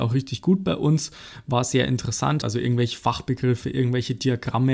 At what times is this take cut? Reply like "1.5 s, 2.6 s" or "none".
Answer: 2.4 s